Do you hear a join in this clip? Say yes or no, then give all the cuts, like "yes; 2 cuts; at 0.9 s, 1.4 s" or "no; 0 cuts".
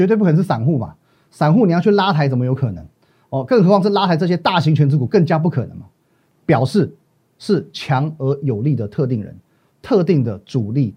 no; 0 cuts